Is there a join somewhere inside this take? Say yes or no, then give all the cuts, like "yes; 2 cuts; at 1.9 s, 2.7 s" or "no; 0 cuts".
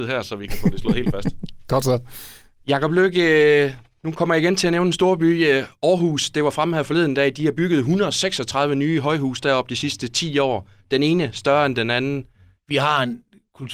yes; 1 cut; at 12.6 s